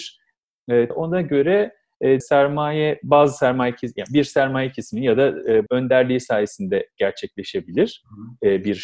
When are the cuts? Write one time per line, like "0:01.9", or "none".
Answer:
0:00.9
0:02.2
0:05.7